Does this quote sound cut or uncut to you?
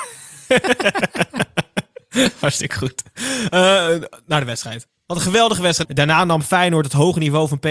cut